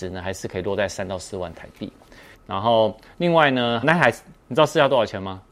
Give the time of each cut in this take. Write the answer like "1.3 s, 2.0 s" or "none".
2.3 s, 3.8 s